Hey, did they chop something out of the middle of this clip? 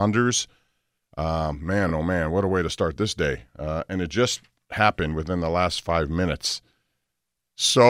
no; 0 cuts

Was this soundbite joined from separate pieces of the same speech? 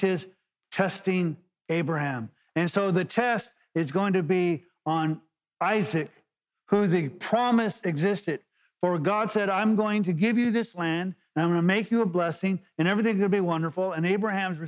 no; 0 cuts

